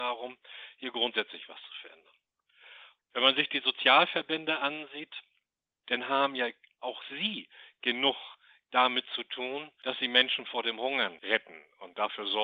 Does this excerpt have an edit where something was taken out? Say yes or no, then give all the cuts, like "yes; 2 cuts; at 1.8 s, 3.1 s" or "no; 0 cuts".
yes; 2 cuts; at 3.0 s, 5.8 s